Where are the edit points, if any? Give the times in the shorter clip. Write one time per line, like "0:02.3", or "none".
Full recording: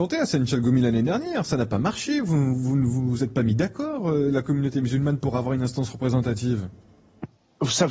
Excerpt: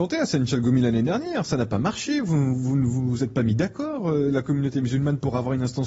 none